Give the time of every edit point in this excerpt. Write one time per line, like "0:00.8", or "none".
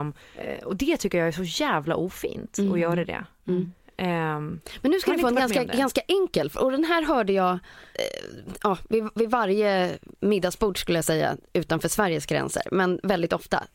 none